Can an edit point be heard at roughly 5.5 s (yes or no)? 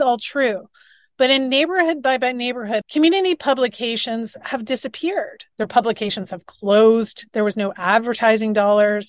yes